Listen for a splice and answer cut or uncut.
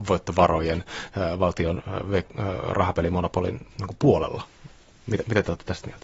uncut